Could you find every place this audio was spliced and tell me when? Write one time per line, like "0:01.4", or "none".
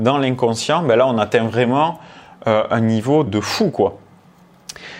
0:03.3

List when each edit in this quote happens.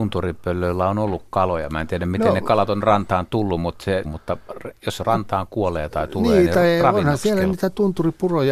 0:04.0

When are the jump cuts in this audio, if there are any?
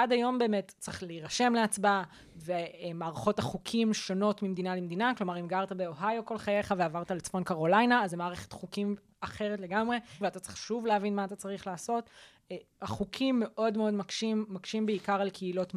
0:10.2

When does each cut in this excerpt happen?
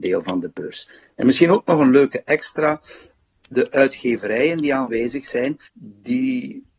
0:05.7

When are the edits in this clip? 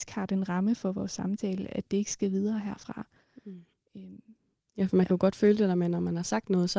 none

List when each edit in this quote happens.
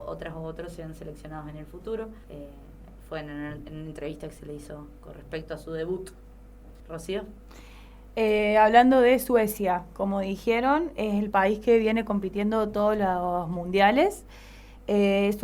0:02.2
0:06.8

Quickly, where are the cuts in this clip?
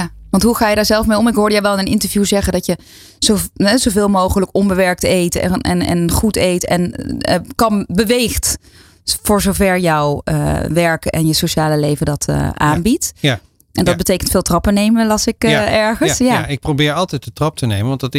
none

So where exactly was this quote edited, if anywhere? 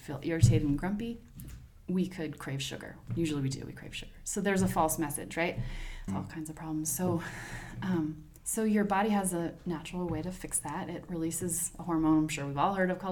0:06.1

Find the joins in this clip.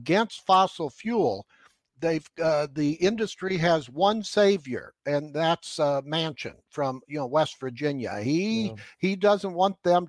none

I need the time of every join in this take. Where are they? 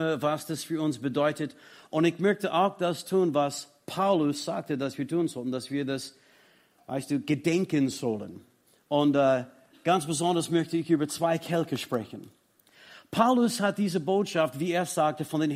none

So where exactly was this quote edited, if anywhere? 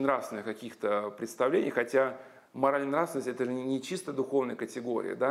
none

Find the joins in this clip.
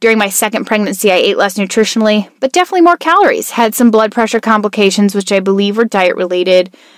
none

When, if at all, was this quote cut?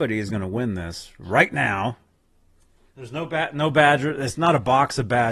0:02.9

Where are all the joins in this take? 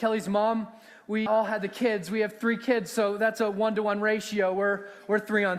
0:01.3

